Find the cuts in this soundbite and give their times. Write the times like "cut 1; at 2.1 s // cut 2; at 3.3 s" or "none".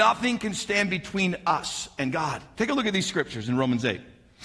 cut 1; at 2.5 s